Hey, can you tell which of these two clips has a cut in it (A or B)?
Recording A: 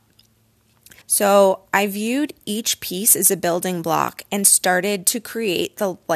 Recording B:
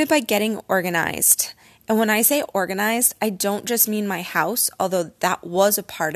A